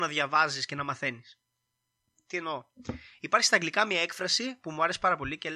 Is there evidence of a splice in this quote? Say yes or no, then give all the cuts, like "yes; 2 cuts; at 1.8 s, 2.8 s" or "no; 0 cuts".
no; 0 cuts